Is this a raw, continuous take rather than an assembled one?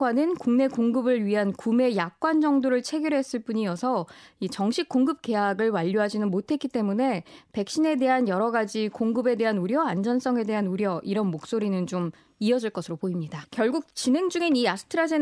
no; 1 cut; at 13.4 s

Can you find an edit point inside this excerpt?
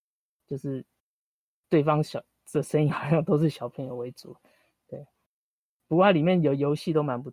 no; 0 cuts

